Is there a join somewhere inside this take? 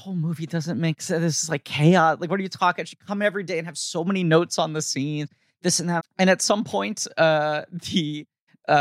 yes; 1 cut; at 6.0 s

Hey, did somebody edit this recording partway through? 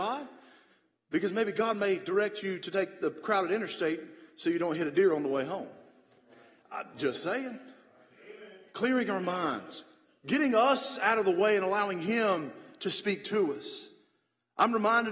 no; 0 cuts

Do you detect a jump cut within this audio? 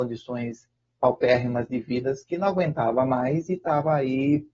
no; 0 cuts

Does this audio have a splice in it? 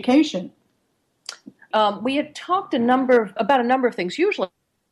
yes; 2 cuts; at 1.7 s, 3.4 s

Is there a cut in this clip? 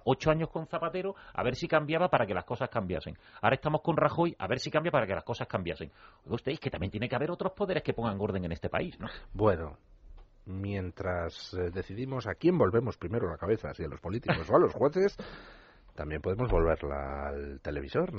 no; 0 cuts

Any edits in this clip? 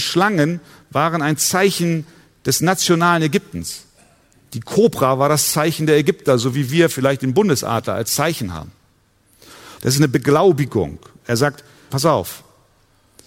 yes; 2 cuts; at 9.8 s, 11.9 s

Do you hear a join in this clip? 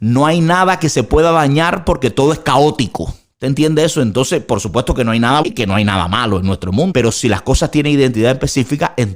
yes; 2 cuts; at 5.4 s, 6.9 s

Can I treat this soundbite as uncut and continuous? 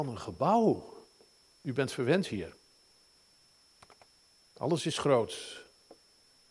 no; 1 cut; at 1.5 s

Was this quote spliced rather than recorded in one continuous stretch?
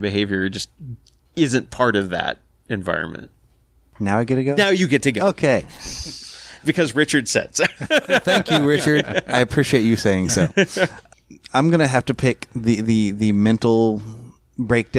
no; 0 cuts

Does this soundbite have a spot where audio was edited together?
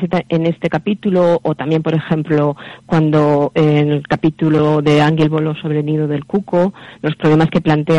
no; 0 cuts

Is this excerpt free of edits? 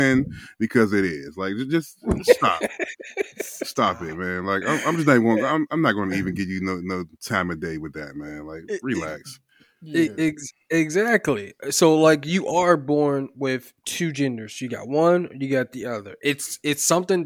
yes; 0 cuts

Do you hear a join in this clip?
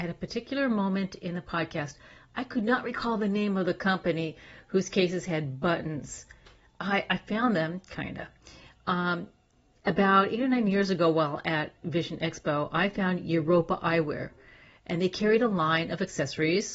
no; 0 cuts

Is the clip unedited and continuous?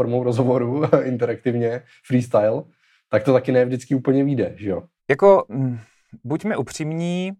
no; 1 cut; at 5.0 s

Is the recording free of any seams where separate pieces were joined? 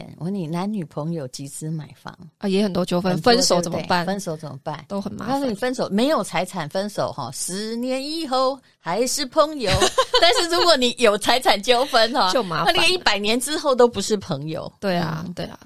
yes; 0 cuts

